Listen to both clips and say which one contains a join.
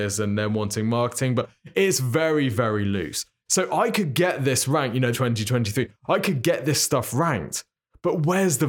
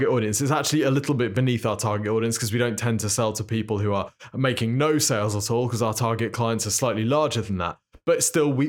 first; 2 cuts; at 2.5 s, 5.1 s

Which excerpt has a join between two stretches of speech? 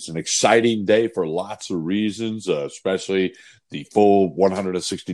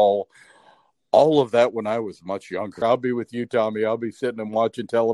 second; 1 cut; at 2.8 s

